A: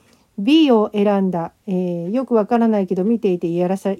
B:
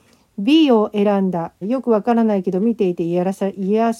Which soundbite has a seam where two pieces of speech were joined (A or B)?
B